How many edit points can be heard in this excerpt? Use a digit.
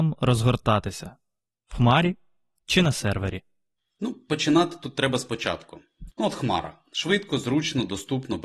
1